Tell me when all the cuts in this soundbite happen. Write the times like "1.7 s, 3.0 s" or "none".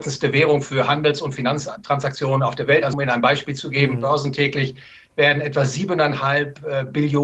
2.9 s